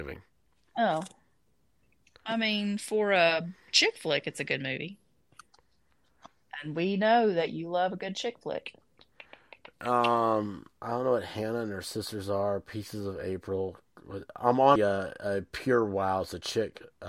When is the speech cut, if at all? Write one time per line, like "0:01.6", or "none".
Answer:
0:14.8